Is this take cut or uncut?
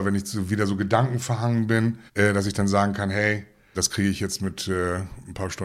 cut